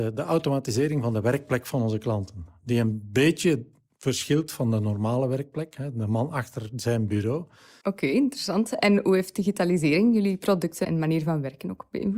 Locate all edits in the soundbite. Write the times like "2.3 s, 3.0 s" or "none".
7.8 s, 10.8 s

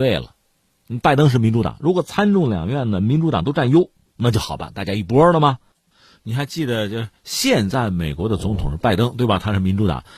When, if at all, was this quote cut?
none

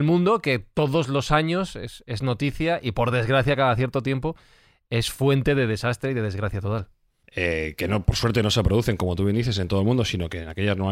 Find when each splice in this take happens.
7.2 s

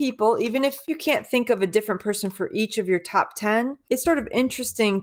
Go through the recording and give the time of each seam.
4.0 s

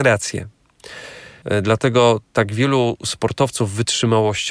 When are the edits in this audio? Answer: 1.4 s

